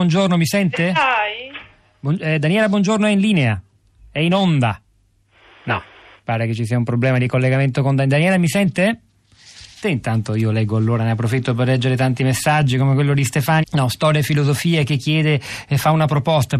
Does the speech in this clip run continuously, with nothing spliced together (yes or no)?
no